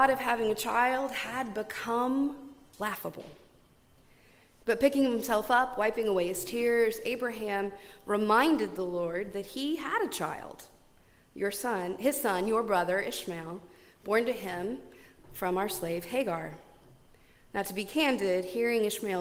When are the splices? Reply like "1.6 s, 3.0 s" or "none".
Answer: 4.6 s